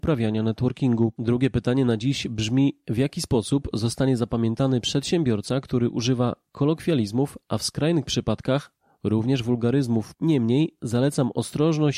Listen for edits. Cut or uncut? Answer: cut